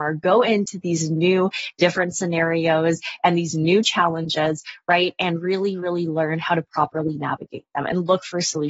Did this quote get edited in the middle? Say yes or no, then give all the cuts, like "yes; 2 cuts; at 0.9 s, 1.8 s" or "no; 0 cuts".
no; 0 cuts